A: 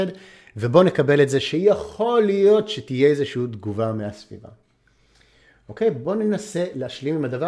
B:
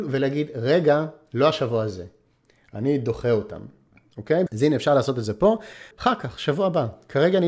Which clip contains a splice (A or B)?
B